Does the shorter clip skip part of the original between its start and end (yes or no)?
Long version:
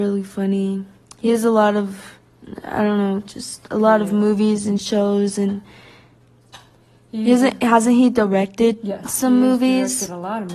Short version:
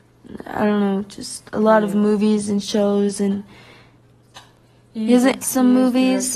yes